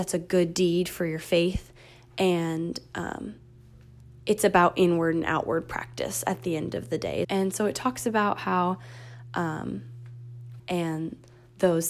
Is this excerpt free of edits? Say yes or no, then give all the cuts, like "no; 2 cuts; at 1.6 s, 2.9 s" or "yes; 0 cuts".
no; 2 cuts; at 7.2 s, 10.6 s